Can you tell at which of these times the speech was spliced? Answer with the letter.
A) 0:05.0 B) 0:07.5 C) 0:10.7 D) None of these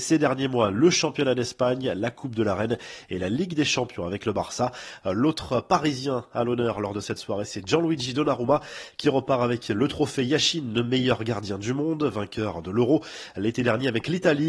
A